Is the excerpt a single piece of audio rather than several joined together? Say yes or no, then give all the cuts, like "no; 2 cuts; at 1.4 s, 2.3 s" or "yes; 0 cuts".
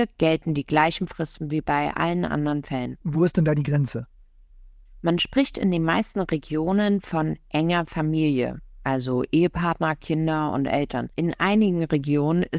no; 2 cuts; at 3.0 s, 11.1 s